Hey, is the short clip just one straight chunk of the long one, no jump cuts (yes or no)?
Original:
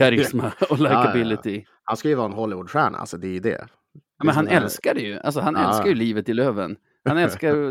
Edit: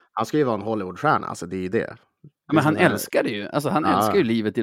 yes